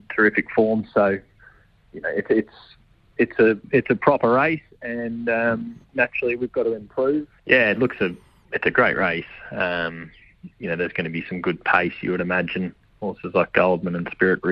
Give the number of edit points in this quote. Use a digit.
2